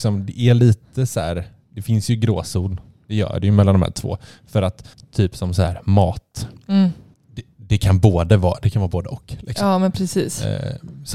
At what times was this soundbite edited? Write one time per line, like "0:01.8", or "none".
none